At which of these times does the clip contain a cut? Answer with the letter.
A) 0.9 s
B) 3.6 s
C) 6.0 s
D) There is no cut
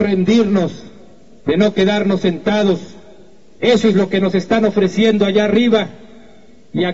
B